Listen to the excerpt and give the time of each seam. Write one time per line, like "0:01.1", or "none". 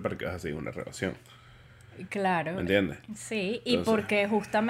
none